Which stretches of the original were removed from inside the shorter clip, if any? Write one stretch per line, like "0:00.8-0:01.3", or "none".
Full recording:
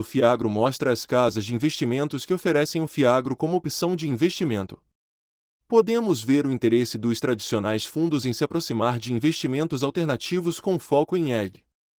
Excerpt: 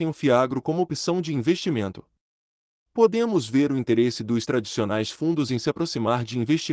none